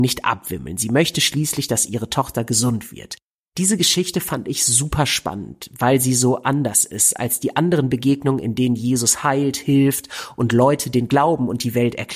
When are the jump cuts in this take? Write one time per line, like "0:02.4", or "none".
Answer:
0:03.4